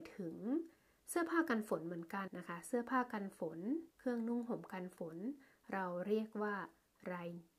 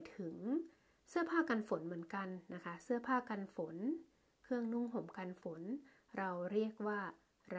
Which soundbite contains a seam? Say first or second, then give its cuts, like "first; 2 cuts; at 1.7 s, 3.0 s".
first; 2 cuts; at 2.3 s, 3.9 s